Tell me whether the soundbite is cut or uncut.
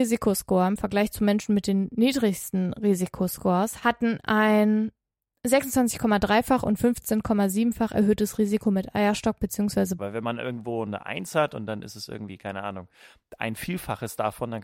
cut